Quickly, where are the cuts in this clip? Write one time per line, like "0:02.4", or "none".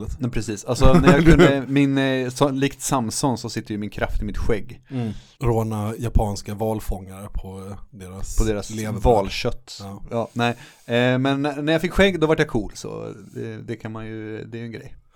0:05.4